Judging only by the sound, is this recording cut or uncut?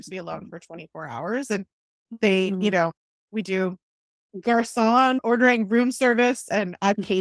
uncut